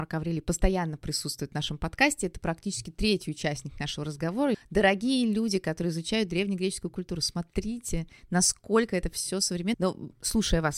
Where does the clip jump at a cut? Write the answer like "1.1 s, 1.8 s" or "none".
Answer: 4.5 s, 9.7 s